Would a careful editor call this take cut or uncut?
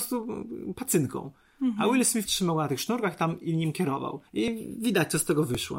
cut